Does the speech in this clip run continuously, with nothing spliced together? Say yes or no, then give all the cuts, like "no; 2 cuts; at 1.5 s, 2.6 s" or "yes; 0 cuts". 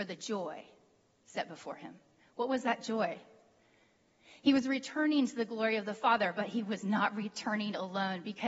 yes; 0 cuts